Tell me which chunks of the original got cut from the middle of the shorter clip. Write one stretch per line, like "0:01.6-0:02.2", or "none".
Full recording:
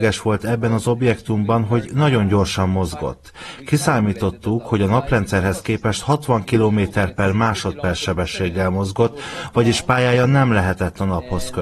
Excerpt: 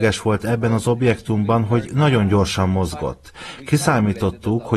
none